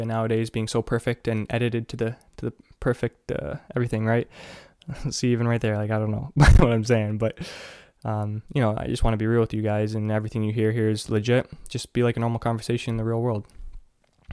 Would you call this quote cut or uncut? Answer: uncut